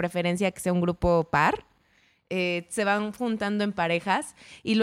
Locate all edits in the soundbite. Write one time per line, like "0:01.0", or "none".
none